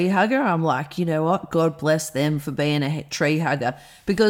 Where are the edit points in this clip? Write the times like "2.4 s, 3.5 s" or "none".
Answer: none